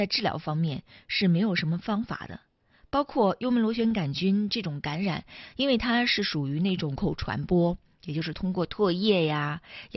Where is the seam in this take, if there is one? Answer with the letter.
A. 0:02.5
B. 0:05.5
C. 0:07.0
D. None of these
C